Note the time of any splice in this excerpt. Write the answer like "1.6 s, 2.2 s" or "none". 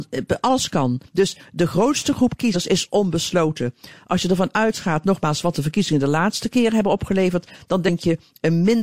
1.0 s

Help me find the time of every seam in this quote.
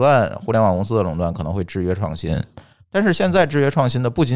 none

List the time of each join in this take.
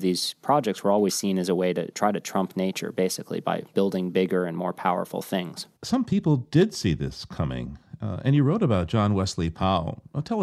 5.8 s

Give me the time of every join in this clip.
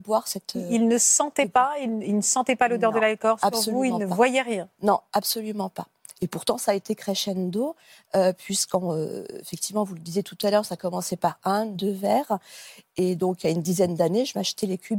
none

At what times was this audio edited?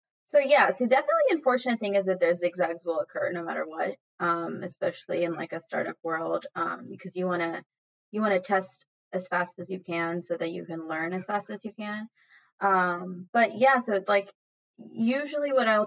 none

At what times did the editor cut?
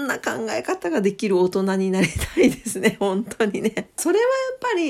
4.0 s

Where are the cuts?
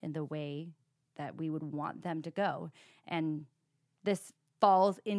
none

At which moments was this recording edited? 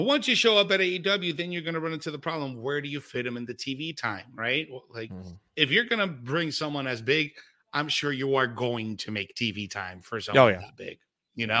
none

